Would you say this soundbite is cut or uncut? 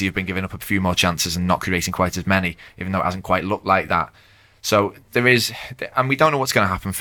uncut